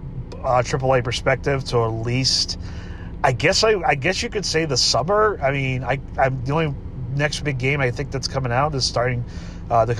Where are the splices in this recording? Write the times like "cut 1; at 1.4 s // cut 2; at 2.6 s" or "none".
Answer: none

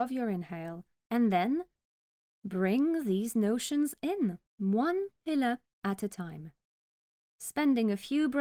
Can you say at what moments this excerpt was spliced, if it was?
cut 1; at 4.5 s

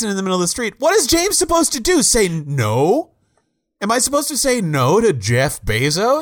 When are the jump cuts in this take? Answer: none

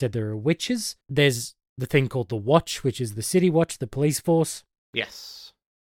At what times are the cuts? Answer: cut 1; at 1.0 s

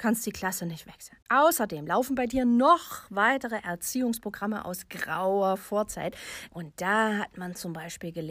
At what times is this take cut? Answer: cut 1; at 1.2 s // cut 2; at 6.5 s

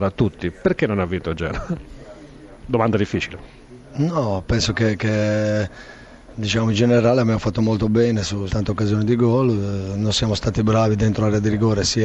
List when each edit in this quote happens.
cut 1; at 8.5 s

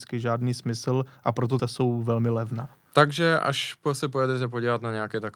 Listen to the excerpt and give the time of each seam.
cut 1; at 1.6 s

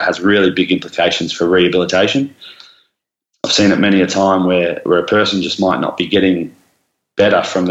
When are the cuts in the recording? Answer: none

